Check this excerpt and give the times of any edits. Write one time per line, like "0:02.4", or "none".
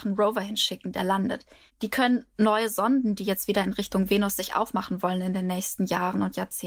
0:01.7